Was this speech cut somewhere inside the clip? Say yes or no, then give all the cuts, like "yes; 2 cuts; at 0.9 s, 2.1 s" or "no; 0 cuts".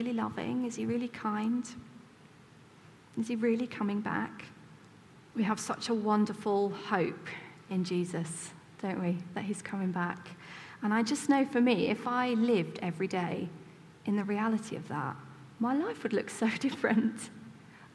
yes; 1 cut; at 5.3 s